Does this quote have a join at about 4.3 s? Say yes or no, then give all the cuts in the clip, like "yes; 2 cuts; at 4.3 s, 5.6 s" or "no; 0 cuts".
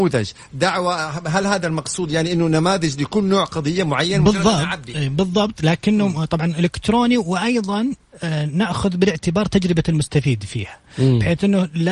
no; 0 cuts